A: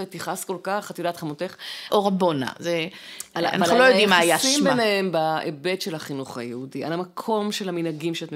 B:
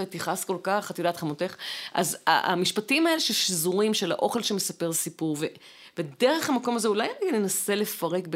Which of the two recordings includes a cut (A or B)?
A